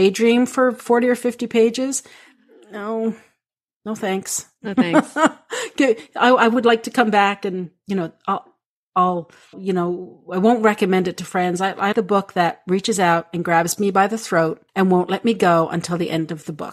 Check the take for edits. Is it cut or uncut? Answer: cut